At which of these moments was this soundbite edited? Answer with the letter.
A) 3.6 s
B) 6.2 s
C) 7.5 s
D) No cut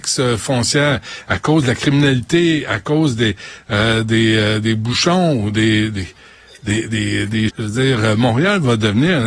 C